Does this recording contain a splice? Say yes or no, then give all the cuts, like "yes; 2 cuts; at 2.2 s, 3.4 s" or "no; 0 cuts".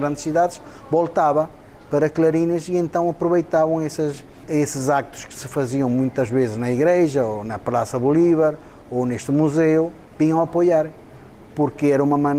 no; 0 cuts